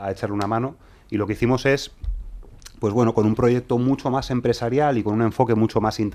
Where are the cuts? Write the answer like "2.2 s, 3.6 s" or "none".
none